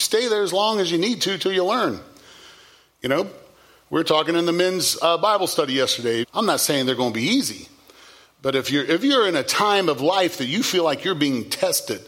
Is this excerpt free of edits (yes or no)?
no